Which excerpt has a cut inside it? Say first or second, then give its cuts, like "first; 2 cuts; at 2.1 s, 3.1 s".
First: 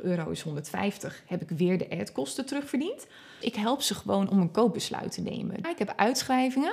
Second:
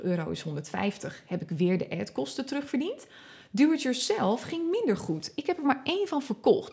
first; 2 cuts; at 3.4 s, 5.6 s